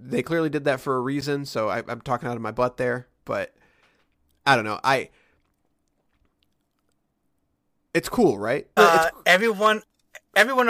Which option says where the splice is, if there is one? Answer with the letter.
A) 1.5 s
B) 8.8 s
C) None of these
B